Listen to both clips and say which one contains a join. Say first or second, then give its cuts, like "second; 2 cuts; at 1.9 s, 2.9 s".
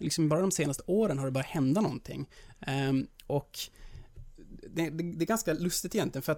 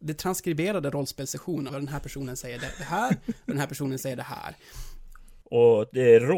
second; 2 cuts; at 1.7 s, 5.4 s